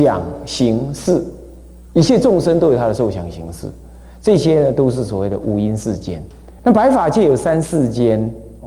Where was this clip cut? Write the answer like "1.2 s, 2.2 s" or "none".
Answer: 6.6 s